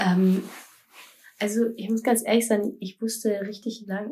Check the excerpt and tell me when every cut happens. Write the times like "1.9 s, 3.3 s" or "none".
none